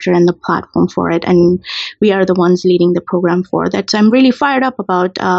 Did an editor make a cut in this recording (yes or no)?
no